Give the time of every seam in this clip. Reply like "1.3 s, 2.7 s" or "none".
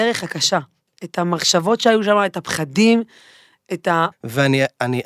4.1 s